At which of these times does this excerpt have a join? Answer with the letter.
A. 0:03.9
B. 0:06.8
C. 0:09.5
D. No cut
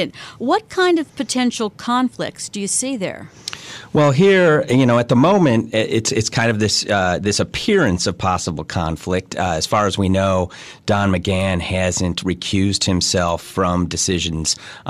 D